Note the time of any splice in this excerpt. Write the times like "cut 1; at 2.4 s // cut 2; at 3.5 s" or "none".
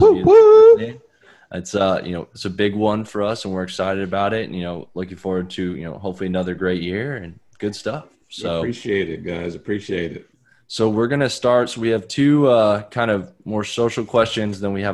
none